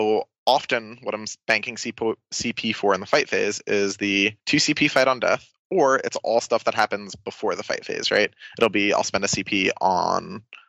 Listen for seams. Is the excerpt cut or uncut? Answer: uncut